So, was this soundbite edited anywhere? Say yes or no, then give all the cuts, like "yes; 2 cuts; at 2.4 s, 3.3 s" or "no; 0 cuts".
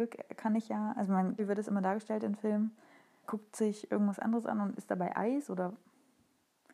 yes; 2 cuts; at 1.4 s, 3.2 s